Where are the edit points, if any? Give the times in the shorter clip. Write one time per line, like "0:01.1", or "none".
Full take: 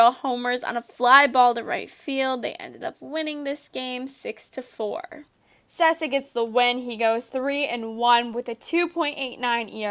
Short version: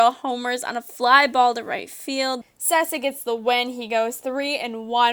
0:02.4